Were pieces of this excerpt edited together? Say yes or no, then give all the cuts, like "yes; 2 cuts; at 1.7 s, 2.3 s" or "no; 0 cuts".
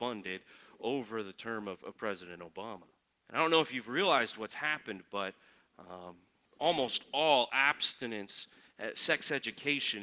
yes; 1 cut; at 3.2 s